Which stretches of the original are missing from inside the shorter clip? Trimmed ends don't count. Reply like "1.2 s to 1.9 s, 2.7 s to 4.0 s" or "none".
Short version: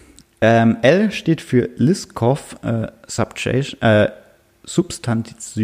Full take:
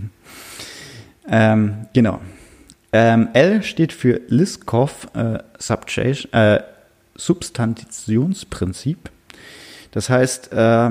none